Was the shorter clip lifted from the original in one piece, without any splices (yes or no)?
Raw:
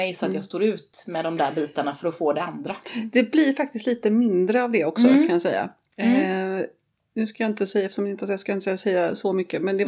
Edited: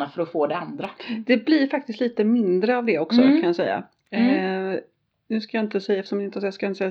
yes